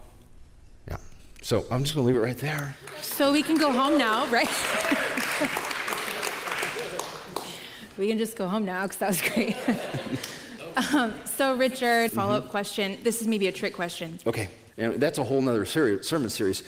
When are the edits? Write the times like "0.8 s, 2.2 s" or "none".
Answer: 12.1 s, 14.7 s